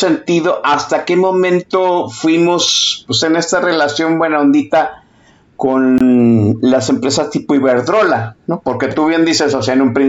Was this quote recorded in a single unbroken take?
yes; 0 cuts

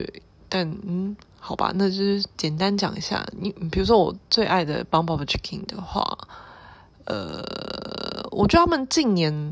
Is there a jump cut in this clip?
no; 0 cuts

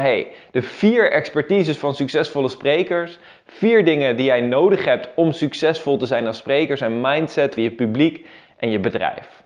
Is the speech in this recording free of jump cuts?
no; 1 cut; at 7.6 s

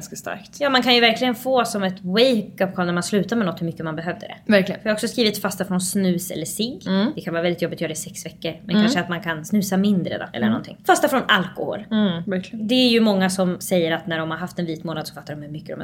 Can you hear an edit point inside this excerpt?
no; 0 cuts

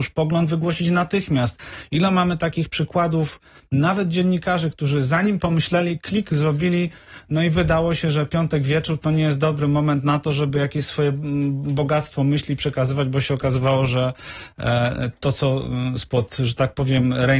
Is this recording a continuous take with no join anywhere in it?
no; 1 cut; at 5.4 s

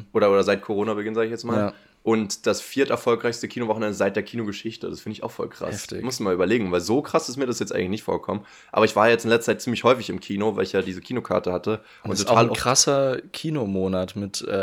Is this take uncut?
yes; 0 cuts

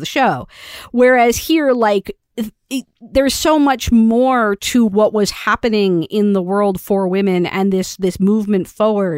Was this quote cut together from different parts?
no; 0 cuts

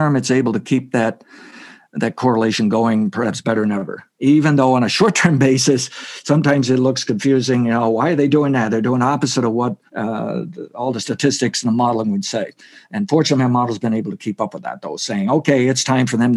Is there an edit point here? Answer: yes; 1 cut; at 9.9 s

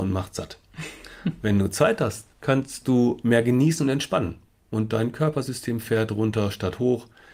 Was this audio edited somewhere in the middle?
yes; 1 cut; at 2.3 s

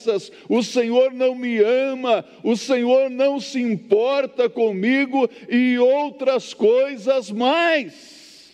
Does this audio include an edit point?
no; 0 cuts

